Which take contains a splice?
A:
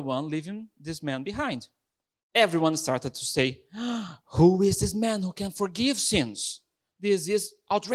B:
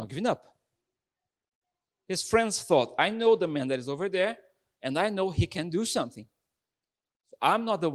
A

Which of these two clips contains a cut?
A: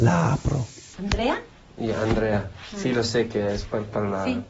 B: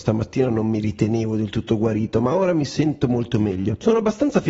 A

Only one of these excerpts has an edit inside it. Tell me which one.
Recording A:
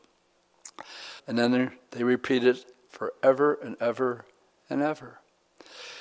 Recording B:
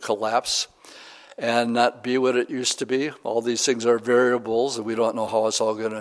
A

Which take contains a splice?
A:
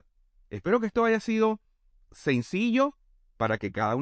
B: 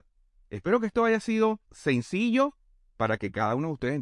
B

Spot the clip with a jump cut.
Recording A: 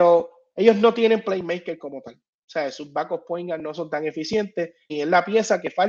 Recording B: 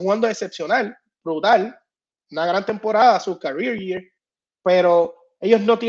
A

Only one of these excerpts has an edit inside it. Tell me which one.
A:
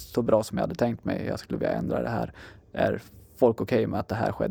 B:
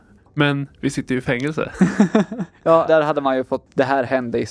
B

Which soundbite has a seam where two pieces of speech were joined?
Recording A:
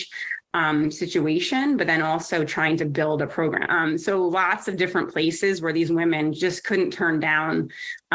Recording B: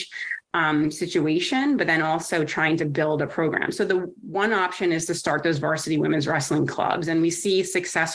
A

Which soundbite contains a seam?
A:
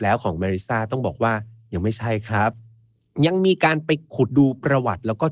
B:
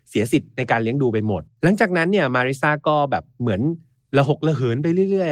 A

